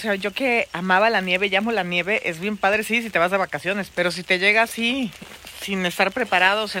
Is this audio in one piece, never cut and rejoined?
no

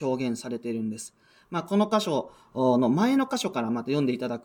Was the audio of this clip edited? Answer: no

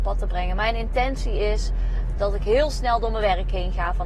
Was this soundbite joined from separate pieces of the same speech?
yes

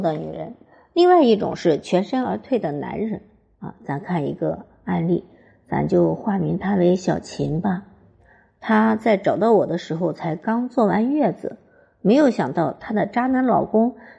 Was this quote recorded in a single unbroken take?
yes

